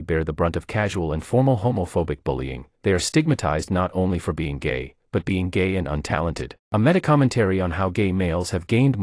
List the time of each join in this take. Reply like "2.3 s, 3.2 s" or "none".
6.6 s